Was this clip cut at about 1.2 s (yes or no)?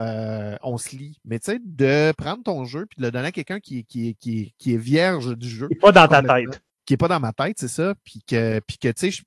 no